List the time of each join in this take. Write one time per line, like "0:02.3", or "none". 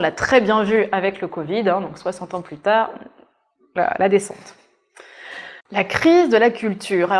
0:05.6